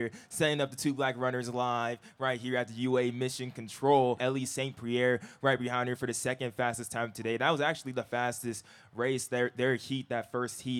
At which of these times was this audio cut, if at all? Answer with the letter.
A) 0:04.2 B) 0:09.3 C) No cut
A